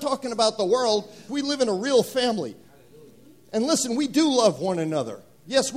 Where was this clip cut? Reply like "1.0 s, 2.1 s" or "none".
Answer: 1.3 s